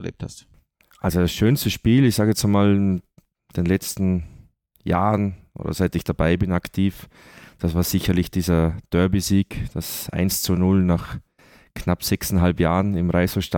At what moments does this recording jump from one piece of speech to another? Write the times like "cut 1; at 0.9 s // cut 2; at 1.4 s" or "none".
none